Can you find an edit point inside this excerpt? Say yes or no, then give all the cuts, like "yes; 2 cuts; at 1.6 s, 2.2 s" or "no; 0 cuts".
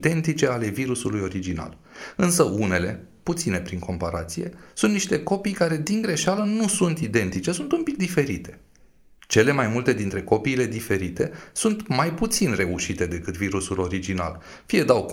no; 0 cuts